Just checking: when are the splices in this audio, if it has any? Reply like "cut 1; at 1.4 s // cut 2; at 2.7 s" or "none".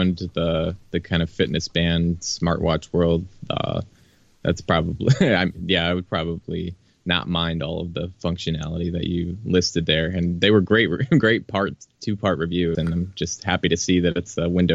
cut 1; at 12.7 s